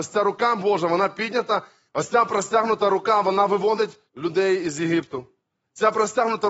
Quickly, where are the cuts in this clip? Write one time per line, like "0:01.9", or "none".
0:01.9
0:04.1